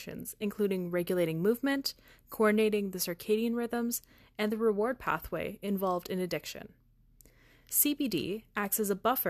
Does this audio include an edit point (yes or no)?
no